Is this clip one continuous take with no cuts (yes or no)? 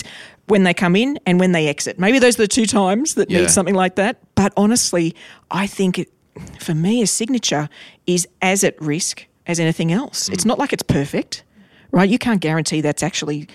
yes